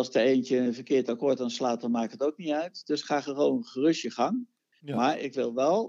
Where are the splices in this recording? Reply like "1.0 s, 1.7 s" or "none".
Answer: none